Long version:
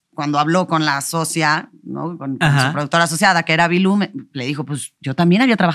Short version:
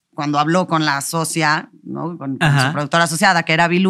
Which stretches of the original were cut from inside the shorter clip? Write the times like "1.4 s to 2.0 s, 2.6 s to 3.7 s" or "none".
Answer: none